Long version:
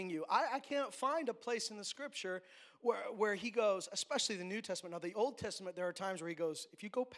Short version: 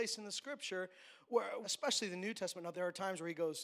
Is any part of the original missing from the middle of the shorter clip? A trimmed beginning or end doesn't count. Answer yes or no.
yes